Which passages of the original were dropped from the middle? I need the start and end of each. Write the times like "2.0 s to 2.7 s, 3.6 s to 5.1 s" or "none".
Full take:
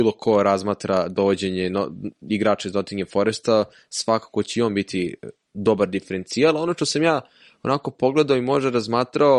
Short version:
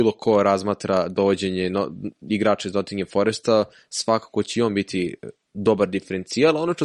none

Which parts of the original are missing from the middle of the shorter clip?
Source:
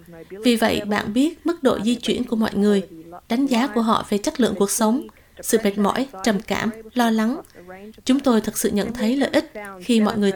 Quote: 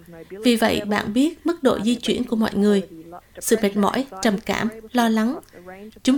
3.2 s to 5.2 s

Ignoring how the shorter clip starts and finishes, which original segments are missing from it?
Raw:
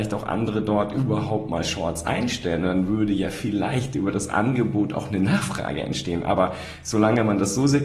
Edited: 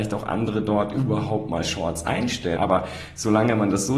2.6 s to 6.2 s

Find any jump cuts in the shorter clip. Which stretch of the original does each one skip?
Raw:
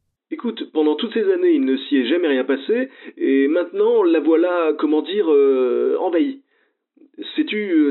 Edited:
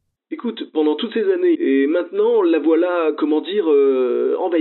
1.5 s to 3.1 s

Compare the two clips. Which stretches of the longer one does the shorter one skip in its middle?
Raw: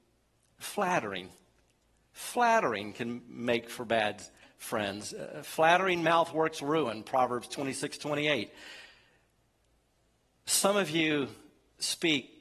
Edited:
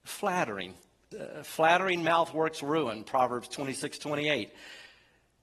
1.7 s to 5.1 s

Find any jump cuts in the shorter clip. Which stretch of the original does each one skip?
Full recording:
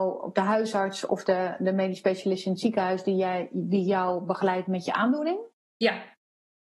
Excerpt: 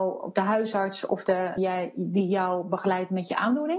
1.6 s to 3.1 s

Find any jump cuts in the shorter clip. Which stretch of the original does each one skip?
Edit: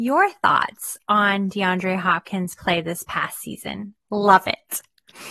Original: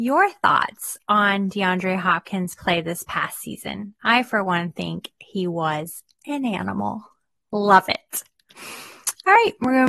4.0 s to 7.4 s

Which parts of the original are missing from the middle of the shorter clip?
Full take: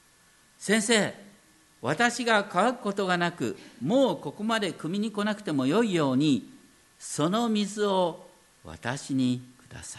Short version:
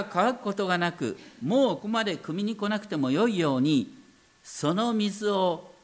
4.2 s to 4.3 s

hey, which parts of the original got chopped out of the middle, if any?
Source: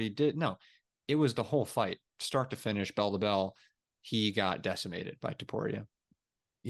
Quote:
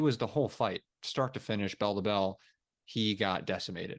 none

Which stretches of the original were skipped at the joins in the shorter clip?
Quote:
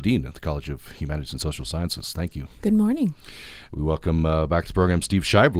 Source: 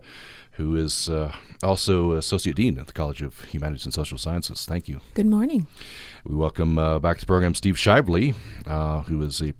none

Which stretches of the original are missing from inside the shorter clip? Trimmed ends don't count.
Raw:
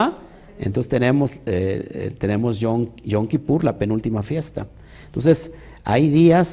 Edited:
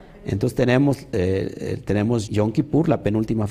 2.6 s to 3.0 s

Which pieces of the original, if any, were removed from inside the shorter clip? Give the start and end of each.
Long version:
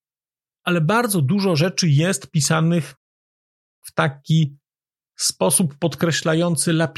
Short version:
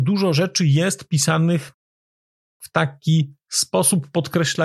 4.6 s to 5.1 s

